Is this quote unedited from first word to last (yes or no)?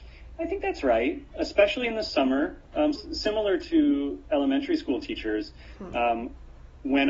no